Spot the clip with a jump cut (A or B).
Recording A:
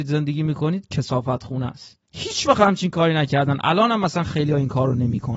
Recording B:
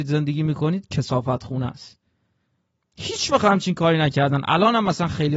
A